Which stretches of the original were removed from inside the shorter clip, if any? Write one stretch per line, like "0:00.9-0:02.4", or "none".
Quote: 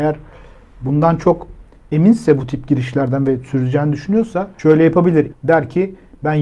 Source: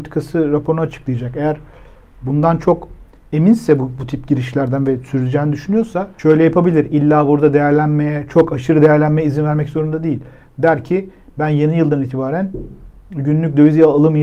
0:03.8-0:04.0
0:06.9-0:10.4

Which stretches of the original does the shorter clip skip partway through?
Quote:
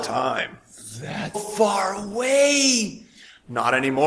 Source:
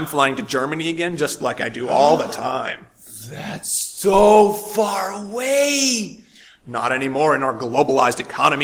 0:03.6-0:04.5

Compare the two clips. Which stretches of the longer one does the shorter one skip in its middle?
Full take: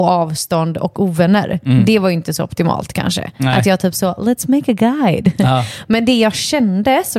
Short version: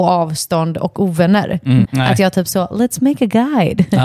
0:01.8-0:03.3

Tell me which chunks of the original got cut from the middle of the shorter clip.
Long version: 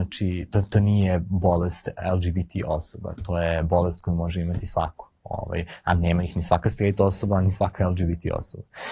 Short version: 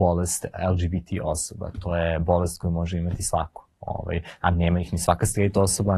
none

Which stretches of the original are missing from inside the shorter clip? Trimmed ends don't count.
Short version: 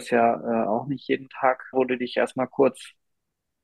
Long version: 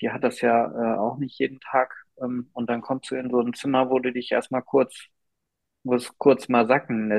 0:02.0-0:03.9

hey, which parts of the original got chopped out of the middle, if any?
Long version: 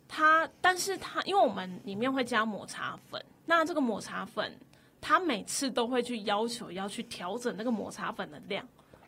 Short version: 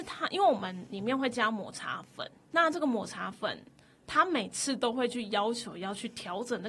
none

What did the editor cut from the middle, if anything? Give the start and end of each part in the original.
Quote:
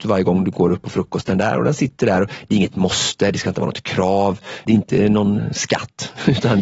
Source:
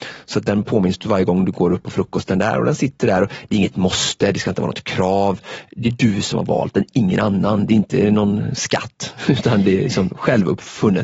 0:05.7-0:07.7

